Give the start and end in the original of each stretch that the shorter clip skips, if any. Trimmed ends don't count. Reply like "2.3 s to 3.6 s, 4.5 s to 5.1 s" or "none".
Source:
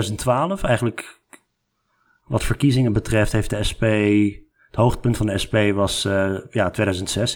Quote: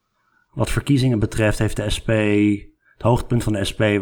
none